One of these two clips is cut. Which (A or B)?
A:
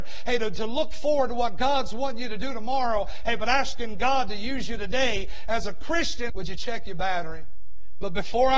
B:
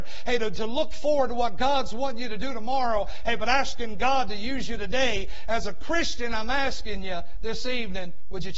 A